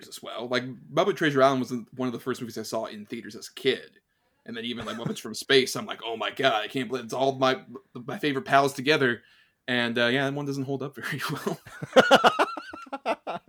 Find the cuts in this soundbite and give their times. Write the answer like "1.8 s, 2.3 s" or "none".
none